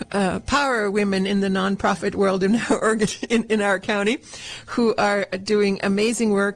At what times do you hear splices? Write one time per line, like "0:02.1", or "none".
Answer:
none